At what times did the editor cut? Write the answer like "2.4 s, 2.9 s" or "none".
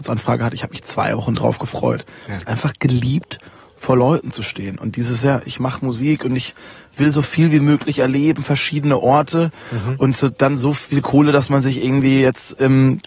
none